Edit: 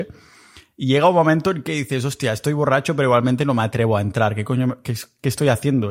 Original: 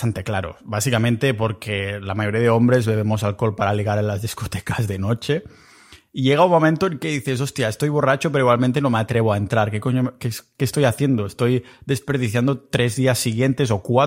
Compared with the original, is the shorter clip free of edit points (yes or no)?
yes